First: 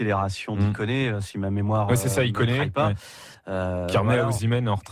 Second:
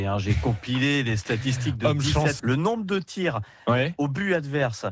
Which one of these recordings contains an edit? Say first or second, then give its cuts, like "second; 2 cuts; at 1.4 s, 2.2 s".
second; 1 cut; at 2.4 s